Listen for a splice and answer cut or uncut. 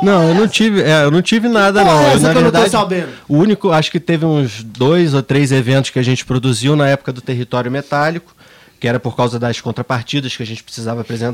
uncut